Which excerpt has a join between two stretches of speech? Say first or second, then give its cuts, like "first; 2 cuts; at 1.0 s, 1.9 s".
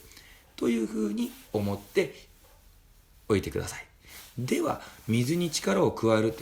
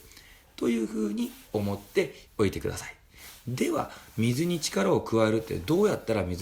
second; 1 cut; at 2.3 s